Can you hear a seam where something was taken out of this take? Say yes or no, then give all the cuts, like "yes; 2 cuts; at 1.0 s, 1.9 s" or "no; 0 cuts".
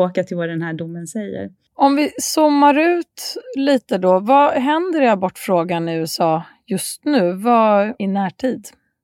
yes; 1 cut; at 7.9 s